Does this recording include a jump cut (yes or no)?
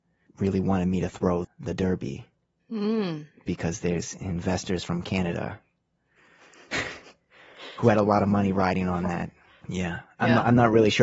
yes